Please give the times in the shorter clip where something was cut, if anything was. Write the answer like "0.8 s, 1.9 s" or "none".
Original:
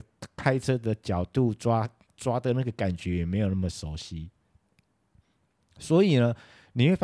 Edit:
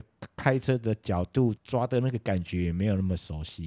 1.6 s